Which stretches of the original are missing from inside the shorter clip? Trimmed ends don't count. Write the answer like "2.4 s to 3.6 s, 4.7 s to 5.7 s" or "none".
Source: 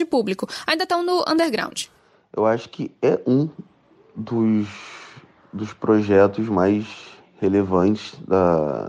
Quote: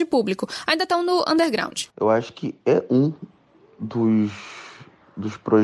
1.9 s to 2.3 s